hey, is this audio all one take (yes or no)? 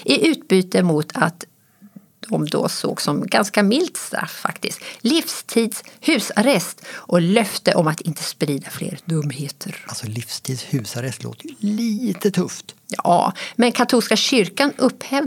yes